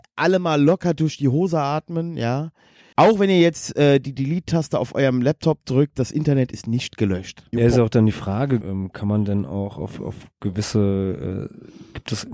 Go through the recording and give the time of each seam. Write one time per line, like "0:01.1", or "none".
0:02.9
0:07.5
0:08.6